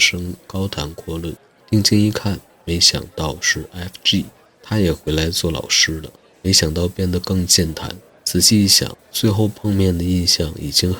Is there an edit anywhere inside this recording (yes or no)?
no